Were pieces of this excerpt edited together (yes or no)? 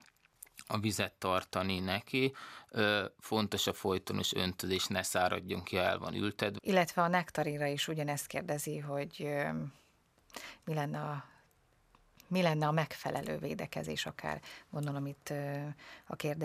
yes